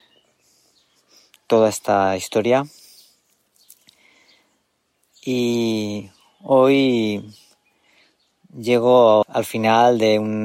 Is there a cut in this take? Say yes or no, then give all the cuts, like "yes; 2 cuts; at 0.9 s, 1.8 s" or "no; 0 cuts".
yes; 1 cut; at 9.2 s